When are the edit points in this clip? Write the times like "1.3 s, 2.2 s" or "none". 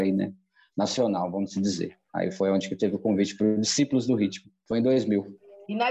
none